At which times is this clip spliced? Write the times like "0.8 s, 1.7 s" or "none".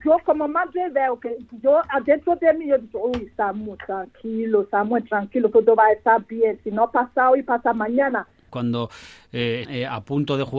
8.5 s, 9.6 s